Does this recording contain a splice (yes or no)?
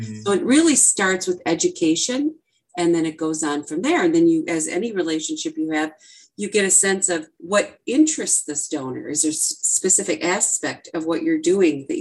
no